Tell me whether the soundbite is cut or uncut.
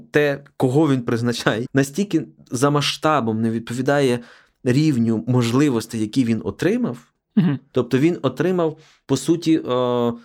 cut